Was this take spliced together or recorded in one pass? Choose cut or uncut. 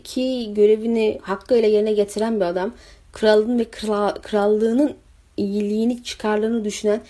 uncut